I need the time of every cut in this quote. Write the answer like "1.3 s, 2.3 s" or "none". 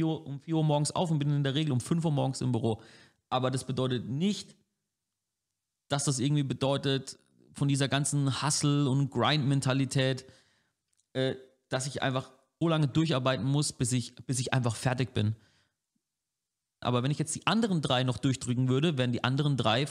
12.6 s, 16.8 s